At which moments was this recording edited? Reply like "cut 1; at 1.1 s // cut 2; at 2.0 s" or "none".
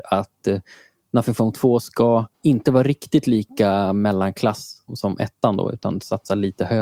cut 1; at 2.3 s // cut 2; at 4.9 s